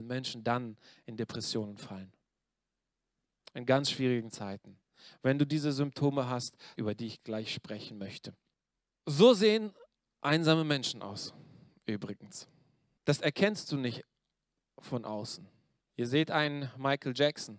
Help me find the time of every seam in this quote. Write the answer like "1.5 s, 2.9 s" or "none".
6.7 s

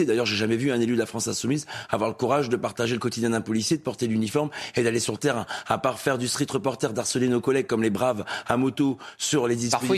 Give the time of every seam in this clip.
none

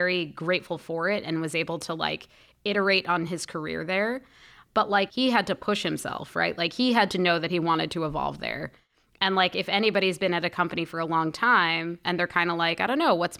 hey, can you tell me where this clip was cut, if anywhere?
none

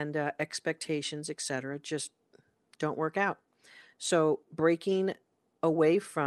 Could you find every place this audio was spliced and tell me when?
none

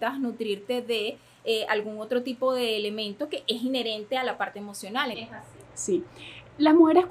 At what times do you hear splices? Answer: 5.1 s

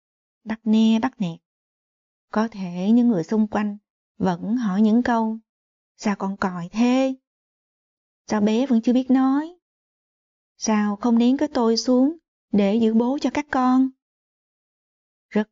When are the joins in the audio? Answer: 2.2 s

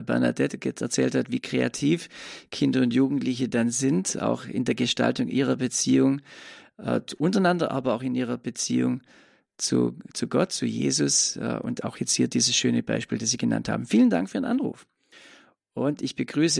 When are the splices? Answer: none

